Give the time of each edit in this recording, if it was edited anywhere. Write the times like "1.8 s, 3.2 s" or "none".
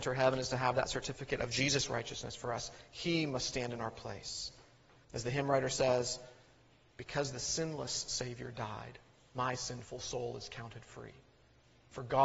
5.0 s